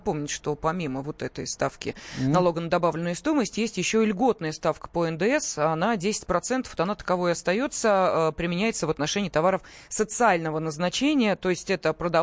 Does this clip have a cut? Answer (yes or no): no